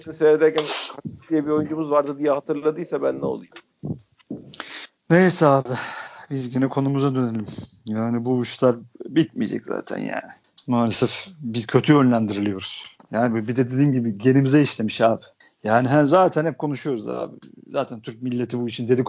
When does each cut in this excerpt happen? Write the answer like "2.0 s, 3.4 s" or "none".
none